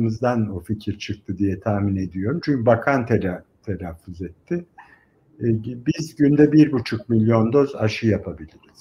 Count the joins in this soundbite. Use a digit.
0